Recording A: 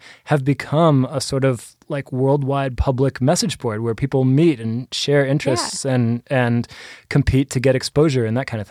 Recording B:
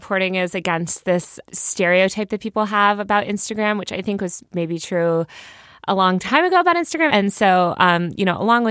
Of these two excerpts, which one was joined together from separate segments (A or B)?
B